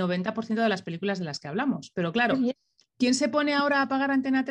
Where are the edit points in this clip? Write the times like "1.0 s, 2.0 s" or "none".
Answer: none